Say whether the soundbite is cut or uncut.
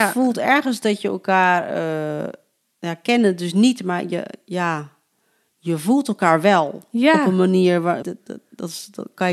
cut